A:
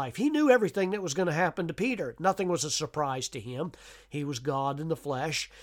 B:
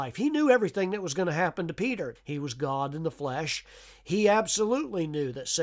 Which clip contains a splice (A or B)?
B